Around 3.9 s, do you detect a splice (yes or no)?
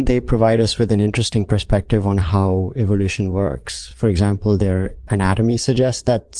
no